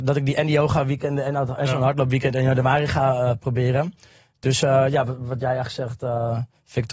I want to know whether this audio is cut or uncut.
uncut